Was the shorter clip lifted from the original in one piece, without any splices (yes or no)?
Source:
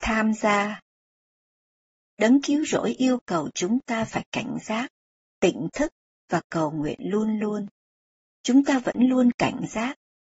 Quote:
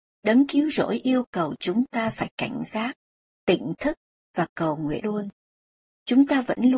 no